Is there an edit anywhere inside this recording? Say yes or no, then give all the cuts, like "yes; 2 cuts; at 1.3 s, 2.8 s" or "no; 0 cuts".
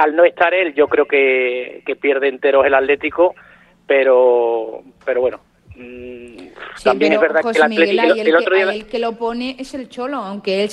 no; 0 cuts